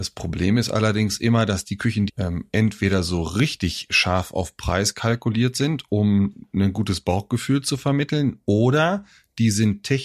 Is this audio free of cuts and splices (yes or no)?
no